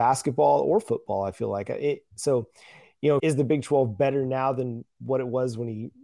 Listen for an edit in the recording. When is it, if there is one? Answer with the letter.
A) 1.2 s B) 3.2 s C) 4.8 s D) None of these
B